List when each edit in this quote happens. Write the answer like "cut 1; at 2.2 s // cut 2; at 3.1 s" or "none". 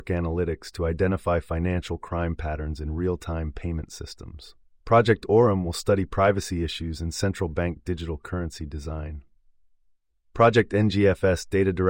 cut 1; at 4.8 s